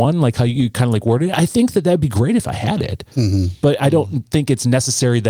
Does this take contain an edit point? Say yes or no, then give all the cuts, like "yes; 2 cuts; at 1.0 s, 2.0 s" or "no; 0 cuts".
no; 0 cuts